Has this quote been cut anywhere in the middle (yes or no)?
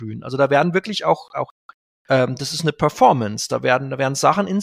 no